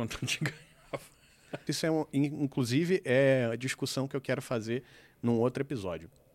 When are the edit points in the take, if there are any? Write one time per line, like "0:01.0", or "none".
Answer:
0:01.7